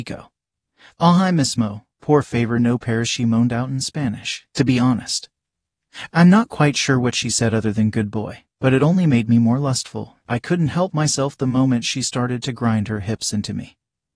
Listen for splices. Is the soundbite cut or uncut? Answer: uncut